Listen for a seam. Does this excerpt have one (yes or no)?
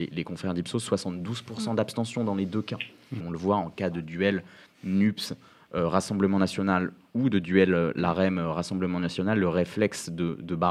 yes